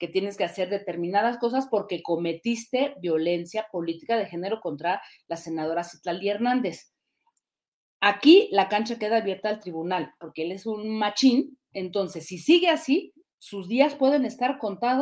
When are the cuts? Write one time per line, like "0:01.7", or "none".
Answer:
0:10.2

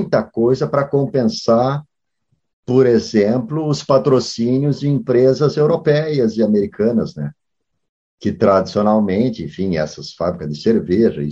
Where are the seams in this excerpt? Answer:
none

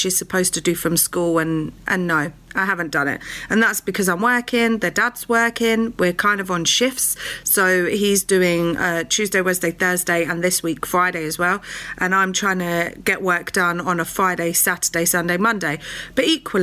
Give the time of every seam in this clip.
none

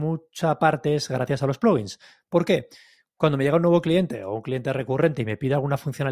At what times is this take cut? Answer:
none

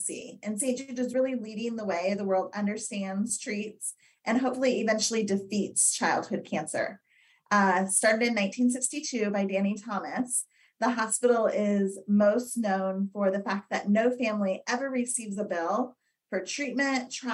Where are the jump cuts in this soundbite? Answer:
none

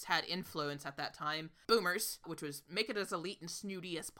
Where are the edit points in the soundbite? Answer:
0:02.2

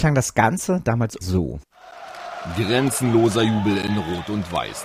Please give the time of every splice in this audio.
none

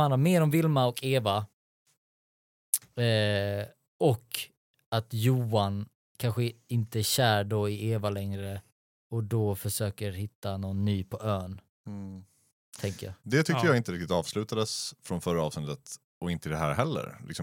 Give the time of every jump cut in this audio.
0:13.2

